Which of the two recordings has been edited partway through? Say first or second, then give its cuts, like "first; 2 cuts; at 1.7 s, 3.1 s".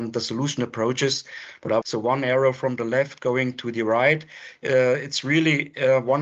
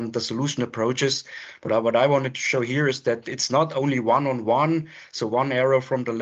first; 1 cut; at 1.8 s